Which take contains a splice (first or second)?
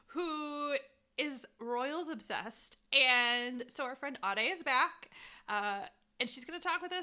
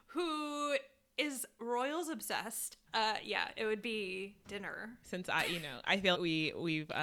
second